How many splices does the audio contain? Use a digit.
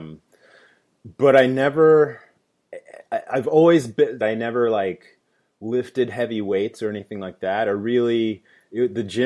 1